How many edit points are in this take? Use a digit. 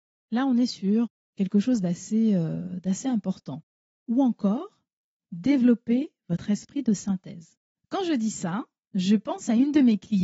2